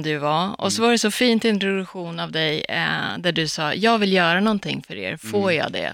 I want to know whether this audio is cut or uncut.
uncut